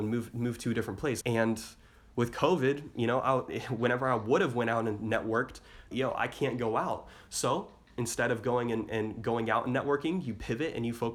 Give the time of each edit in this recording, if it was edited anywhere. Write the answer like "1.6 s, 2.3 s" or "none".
1.2 s, 5.9 s